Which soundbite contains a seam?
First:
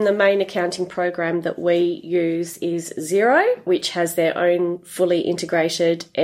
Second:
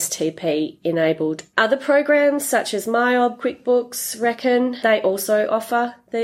second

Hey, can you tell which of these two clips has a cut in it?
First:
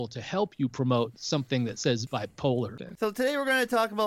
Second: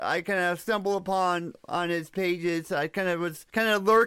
first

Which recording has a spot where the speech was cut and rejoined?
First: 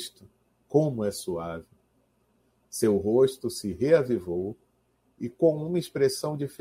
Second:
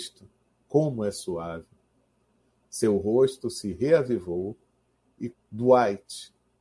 second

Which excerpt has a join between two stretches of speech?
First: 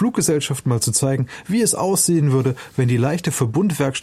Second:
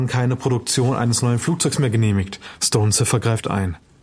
second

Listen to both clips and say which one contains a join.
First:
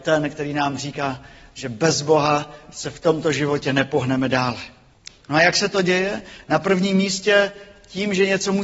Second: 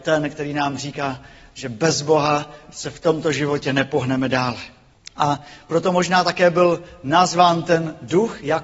first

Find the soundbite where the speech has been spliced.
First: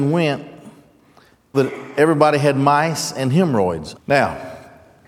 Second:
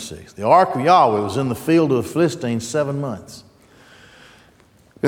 first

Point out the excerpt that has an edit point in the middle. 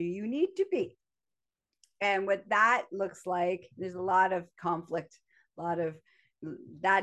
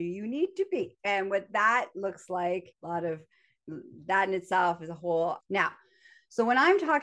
second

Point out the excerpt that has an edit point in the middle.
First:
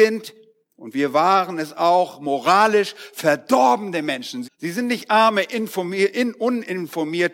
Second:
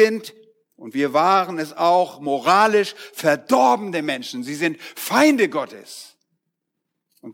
first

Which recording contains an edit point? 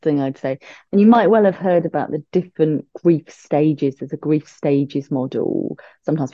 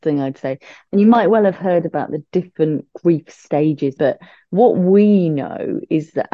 second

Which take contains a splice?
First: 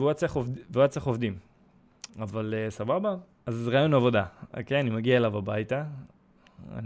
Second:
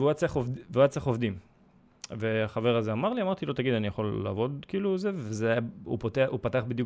first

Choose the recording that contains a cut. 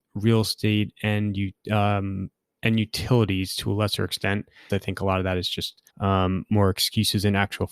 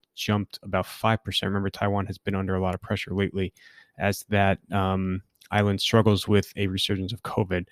first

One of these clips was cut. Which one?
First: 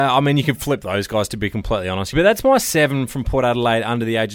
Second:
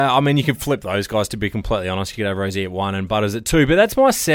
first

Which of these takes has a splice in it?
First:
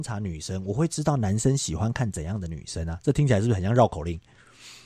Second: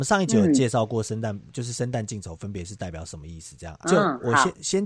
second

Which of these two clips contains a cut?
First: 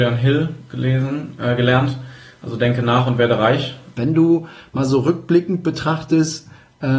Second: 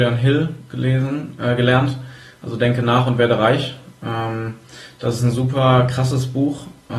first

